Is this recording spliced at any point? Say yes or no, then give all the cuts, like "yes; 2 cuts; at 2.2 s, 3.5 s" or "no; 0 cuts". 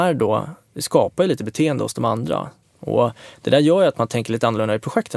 yes; 1 cut; at 2.6 s